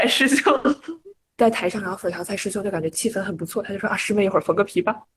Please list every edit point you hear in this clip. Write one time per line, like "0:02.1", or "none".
none